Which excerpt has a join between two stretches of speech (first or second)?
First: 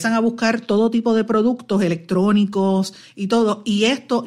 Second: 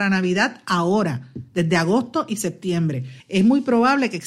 second